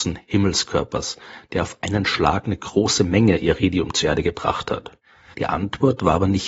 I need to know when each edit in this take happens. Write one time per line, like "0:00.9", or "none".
0:05.3